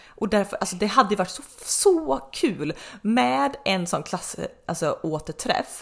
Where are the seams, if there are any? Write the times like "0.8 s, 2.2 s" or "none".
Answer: none